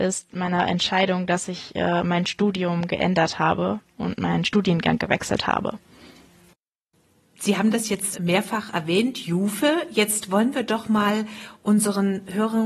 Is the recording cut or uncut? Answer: cut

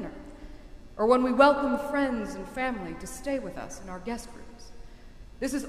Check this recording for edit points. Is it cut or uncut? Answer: uncut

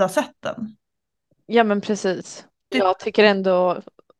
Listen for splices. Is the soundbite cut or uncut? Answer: cut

